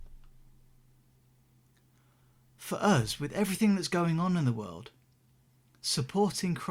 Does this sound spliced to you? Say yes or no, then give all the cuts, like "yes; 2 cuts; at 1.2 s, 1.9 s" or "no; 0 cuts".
no; 0 cuts